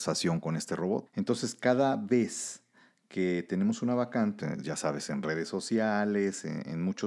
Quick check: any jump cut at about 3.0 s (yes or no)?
no